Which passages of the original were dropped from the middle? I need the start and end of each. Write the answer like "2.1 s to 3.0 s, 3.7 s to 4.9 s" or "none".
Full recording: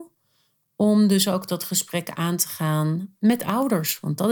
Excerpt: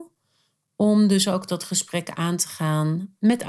none